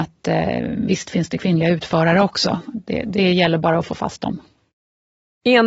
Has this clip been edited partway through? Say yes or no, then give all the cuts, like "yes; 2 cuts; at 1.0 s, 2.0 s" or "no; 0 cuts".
no; 0 cuts